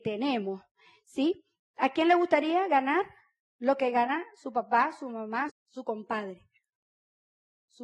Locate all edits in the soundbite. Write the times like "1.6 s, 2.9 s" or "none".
5.5 s